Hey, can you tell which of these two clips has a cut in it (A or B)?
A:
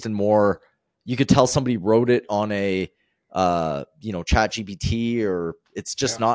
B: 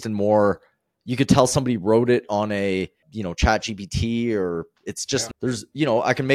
B